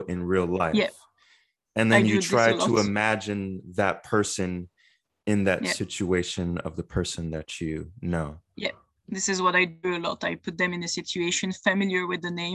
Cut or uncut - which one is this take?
uncut